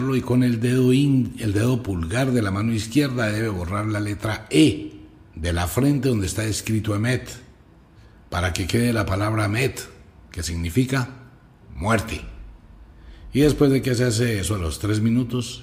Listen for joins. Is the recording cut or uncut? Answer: uncut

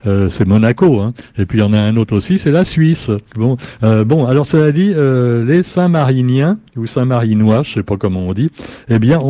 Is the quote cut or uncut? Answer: cut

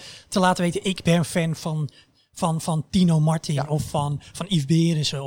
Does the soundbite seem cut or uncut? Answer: uncut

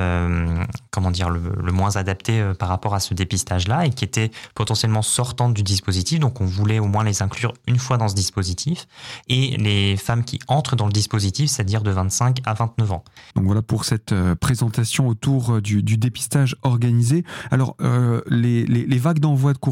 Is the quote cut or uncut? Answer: cut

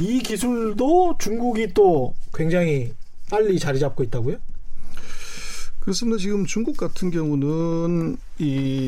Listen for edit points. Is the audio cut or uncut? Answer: uncut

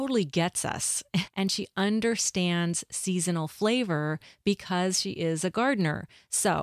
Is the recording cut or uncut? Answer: cut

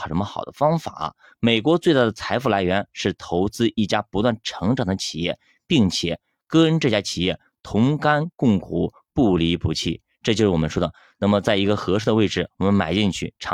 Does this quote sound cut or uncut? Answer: uncut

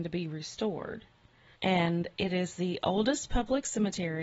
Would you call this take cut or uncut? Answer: cut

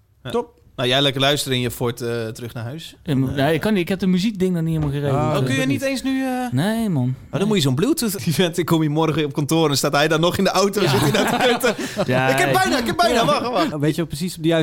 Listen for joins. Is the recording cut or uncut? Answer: cut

